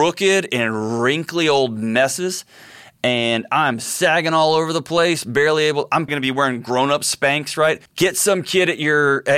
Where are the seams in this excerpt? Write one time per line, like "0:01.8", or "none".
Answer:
0:06.1
0:07.9